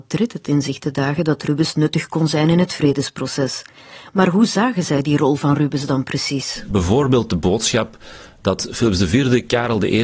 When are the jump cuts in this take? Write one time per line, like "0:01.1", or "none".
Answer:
0:06.7

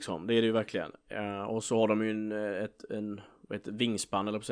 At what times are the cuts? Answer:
none

